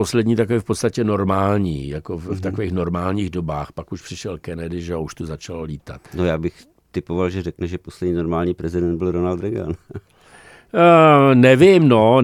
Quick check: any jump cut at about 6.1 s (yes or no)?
yes